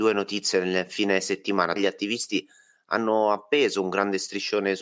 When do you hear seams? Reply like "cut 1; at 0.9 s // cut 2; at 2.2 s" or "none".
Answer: cut 1; at 1.8 s